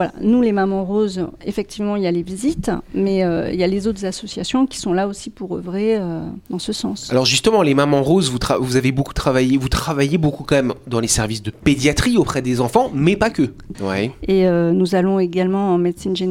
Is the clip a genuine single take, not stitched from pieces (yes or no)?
no